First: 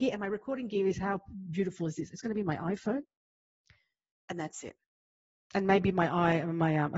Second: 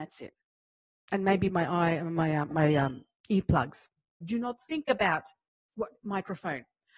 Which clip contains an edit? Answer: second; 2 cuts; at 2.5 s, 4.2 s

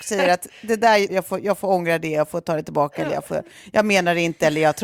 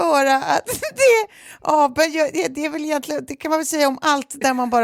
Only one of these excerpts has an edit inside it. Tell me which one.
first; 1 cut; at 1.1 s

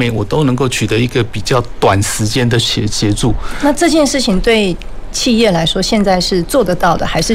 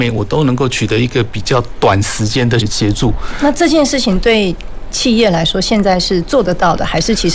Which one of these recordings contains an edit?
second; 1 cut; at 2.6 s

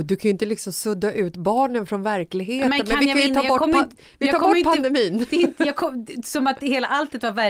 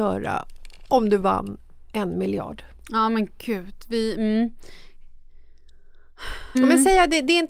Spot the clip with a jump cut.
second; 1 cut; at 6.5 s

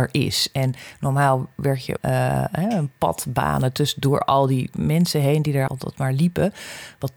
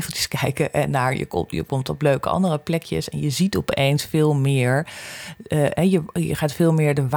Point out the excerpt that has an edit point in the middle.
first; 2 cuts; at 2.0 s, 5.7 s

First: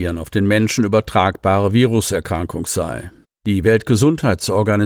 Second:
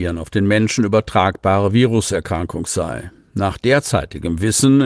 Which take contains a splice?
first; 1 cut; at 3.2 s

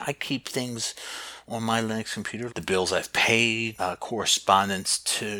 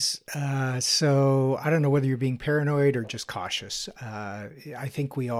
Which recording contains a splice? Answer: first; 2 cuts; at 2.5 s, 3.8 s

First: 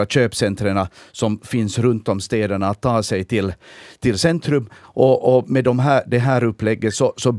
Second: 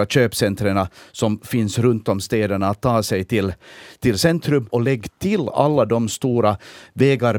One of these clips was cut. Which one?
second; 1 cut; at 4.7 s

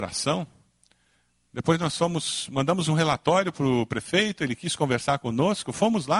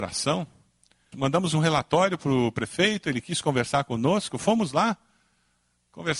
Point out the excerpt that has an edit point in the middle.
second; 1 cut; at 1.1 s

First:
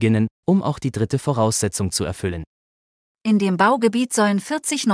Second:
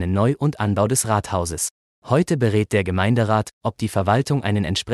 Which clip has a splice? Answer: first; 1 cut; at 3.1 s

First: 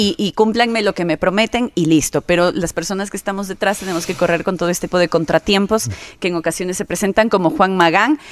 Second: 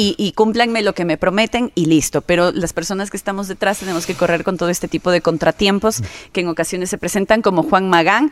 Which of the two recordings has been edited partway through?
first; 1 cut; at 4.9 s

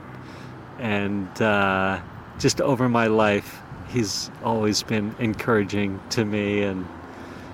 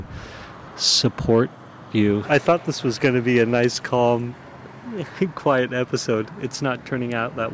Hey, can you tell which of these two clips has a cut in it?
second; 1 cut; at 2.2 s

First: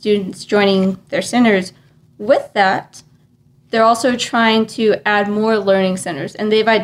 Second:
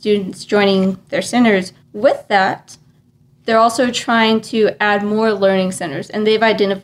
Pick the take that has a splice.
second; 1 cut; at 1.8 s

